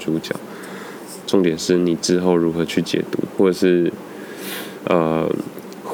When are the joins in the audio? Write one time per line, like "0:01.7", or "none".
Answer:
0:01.2
0:03.3